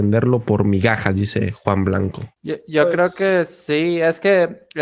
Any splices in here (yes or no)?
yes